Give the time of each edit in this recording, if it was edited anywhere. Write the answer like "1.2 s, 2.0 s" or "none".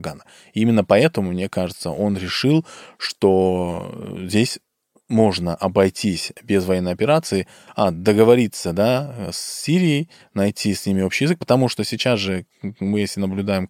none